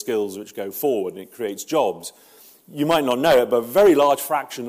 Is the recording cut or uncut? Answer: uncut